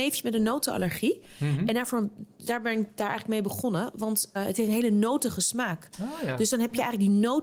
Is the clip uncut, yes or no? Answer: no